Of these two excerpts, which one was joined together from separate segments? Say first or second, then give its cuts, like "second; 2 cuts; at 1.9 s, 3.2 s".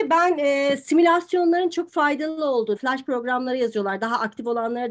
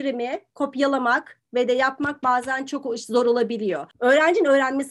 first; 1 cut; at 2.8 s